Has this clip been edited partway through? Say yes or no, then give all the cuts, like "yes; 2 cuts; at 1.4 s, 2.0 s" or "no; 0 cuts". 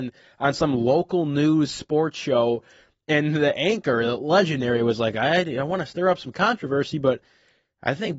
no; 0 cuts